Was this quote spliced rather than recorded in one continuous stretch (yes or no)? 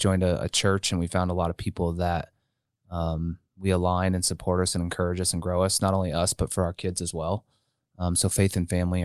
no